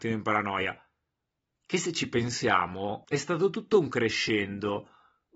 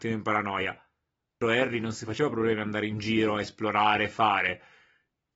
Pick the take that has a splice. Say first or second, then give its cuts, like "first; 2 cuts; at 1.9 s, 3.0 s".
second; 1 cut; at 1.4 s